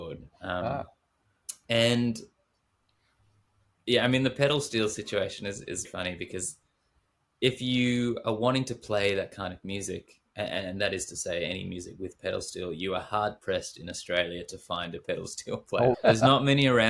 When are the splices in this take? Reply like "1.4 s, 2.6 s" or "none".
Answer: 5.8 s, 15.9 s